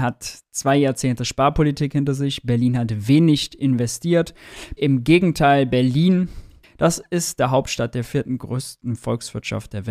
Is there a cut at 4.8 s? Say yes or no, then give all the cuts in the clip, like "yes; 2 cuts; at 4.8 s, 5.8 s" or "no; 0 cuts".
yes; 2 cuts; at 4.8 s, 6.6 s